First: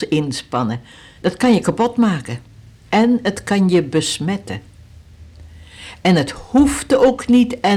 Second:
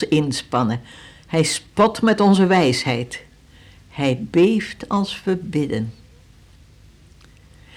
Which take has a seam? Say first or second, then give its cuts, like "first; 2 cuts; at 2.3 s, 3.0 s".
first; 1 cut; at 1.2 s